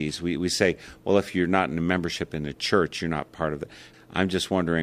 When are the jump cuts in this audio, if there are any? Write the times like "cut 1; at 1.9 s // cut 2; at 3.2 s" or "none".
cut 1; at 3.9 s